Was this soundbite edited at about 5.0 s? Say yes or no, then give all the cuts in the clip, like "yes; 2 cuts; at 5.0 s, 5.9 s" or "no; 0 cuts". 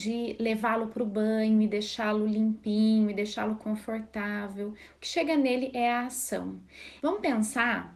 no; 1 cut; at 7.0 s